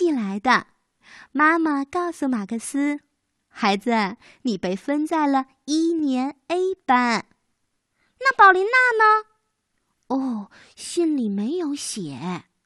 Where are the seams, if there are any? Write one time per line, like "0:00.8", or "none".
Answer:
none